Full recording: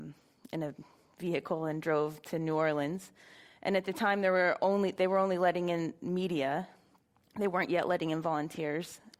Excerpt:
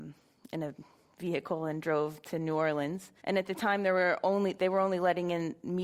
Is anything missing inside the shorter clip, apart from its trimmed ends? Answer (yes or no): yes